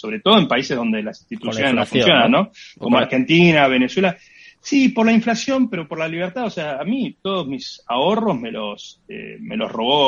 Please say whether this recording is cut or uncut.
uncut